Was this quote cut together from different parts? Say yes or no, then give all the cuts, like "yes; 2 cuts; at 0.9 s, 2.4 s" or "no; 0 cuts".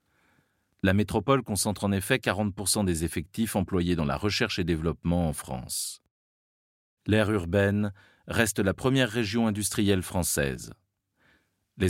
yes; 1 cut; at 7.0 s